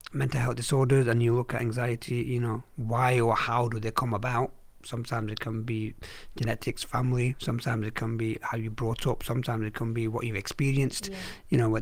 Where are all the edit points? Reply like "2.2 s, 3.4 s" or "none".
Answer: none